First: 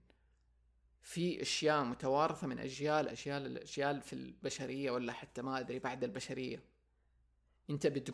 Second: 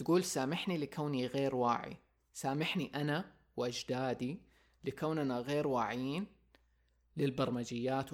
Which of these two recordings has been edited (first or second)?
first